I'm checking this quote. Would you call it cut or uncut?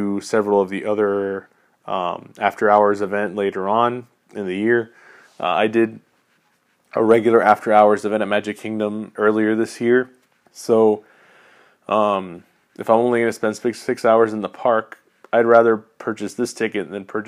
cut